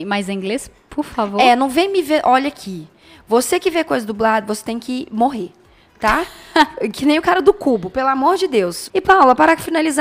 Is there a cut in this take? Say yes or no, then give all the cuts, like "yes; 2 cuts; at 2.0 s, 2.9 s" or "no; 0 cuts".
yes; 1 cut; at 8.9 s